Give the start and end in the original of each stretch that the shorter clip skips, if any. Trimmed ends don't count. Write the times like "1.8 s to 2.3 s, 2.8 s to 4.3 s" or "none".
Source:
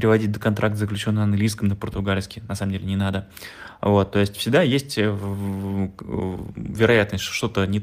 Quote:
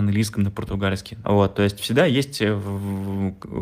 2.5 s to 3.8 s